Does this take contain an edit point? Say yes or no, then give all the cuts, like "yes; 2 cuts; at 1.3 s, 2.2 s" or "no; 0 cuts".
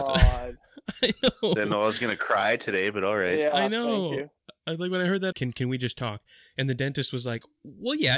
yes; 1 cut; at 5.3 s